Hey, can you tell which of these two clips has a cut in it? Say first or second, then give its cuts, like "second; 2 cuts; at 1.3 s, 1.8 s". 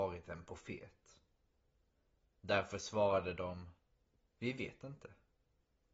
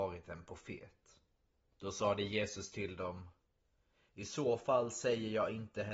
second; 1 cut; at 1.7 s